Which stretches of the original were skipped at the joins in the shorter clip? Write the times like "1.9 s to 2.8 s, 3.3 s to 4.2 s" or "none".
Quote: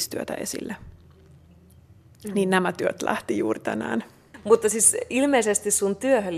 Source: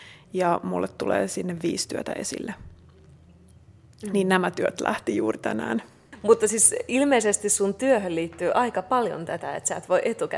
none

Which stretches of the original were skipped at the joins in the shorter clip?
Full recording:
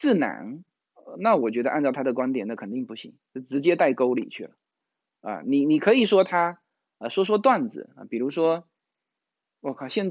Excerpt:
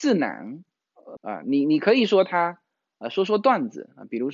1.2 s to 5.2 s

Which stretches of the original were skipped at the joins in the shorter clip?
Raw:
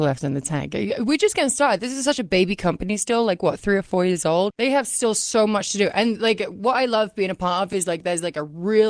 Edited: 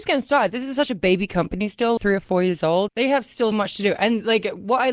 3.3 s to 3.6 s, 5.1 s to 5.5 s

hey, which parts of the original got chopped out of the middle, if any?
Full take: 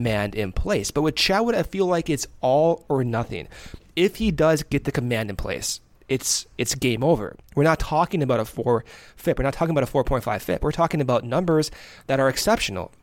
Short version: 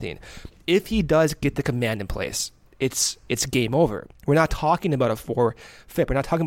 none

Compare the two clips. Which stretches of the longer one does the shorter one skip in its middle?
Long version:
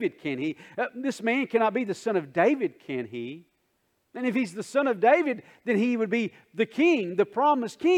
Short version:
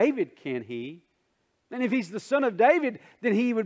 none

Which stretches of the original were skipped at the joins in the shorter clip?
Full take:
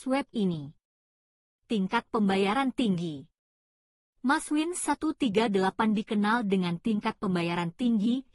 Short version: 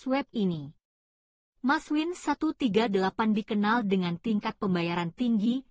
1.4 s to 4.0 s

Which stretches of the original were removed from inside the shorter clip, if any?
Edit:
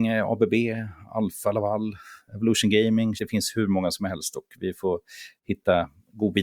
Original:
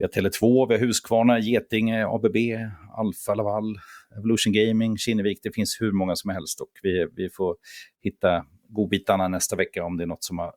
5.0 s to 5.4 s, 6.8 s to 7.1 s

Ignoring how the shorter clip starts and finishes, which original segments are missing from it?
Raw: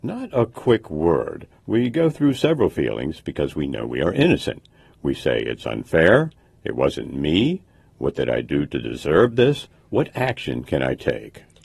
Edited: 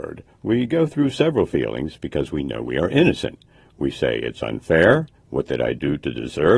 6.4 s to 7.9 s

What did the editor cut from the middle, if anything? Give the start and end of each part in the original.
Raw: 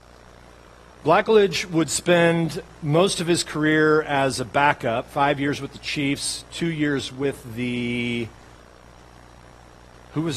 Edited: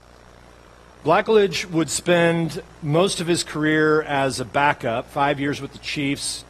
none

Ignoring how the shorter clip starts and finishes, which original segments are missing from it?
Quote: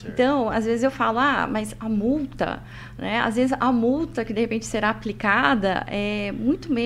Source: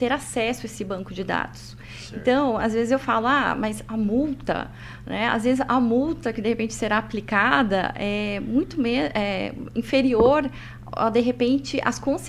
none

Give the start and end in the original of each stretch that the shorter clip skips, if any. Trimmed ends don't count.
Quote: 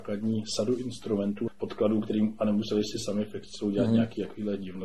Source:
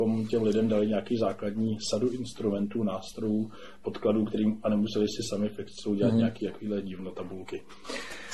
2.8 s to 3.7 s

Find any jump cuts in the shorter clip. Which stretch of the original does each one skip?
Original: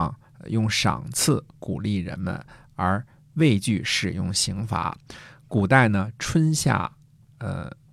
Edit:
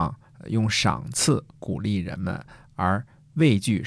none

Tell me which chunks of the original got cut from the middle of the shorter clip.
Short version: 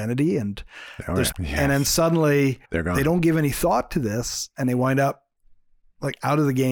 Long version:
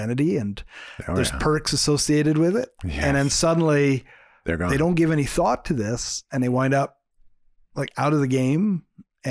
1.3 s to 2.8 s, 4.1 s to 4.4 s

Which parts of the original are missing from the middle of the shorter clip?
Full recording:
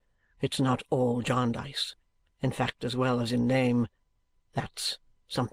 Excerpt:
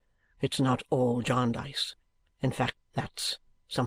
2.8 s to 4.4 s

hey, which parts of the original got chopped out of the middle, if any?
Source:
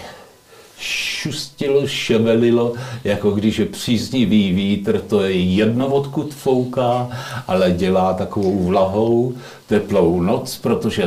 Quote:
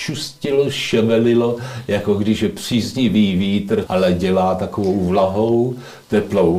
5.0 s to 7.4 s

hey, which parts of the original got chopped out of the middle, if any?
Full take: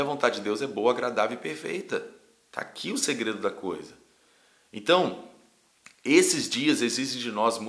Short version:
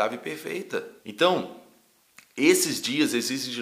2.2 s to 4.7 s

